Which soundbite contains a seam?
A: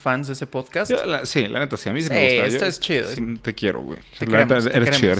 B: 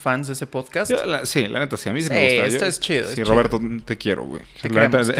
A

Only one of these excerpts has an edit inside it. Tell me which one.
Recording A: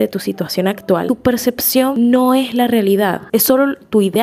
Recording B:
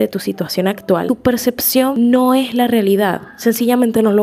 A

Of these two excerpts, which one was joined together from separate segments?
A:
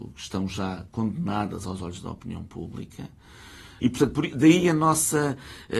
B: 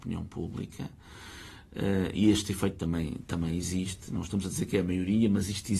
A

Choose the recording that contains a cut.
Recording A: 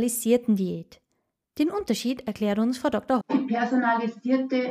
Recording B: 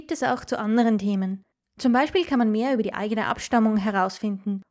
A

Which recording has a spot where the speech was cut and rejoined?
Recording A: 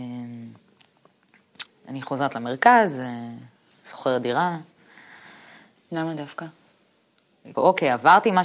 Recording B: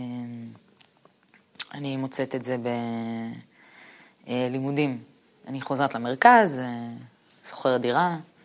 A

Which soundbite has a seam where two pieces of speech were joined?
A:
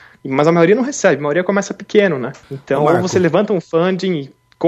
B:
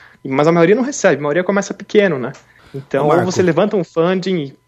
A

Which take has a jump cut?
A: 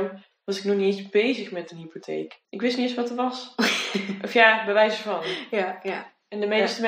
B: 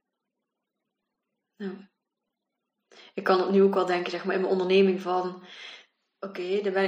A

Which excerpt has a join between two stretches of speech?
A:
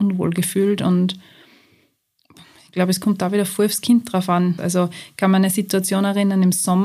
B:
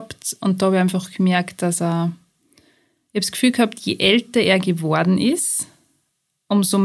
A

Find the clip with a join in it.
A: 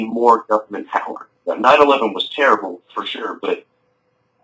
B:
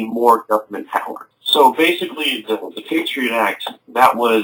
B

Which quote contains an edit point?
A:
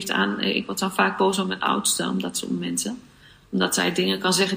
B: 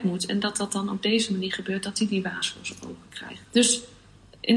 B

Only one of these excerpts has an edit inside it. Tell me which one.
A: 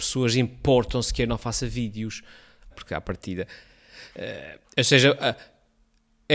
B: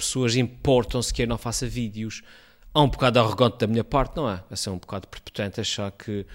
A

